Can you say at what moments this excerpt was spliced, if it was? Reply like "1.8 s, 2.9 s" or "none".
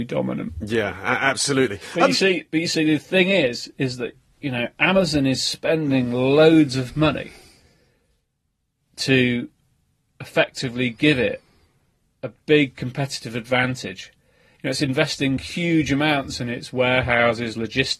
none